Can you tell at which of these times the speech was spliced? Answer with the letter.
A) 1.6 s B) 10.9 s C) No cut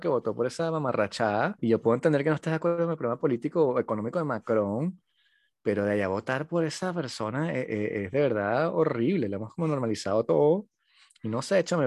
A